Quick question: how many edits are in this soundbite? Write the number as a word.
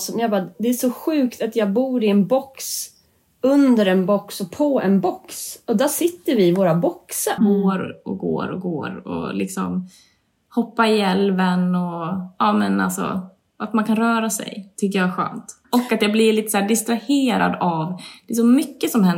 two